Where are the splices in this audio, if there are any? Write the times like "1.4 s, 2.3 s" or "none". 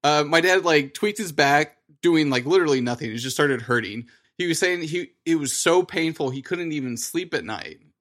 4.2 s